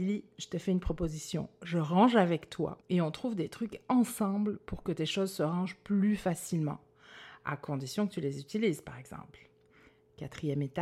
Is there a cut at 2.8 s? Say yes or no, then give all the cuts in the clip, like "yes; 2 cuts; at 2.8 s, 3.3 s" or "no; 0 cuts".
yes; 1 cut; at 2.8 s